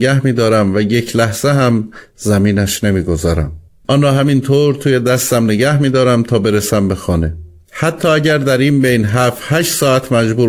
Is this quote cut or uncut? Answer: cut